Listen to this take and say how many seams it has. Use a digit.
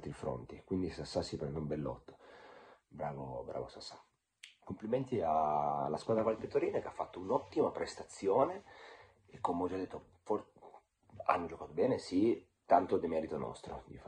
0